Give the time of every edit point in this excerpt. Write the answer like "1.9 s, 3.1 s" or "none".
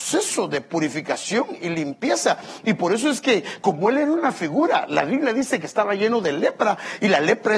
none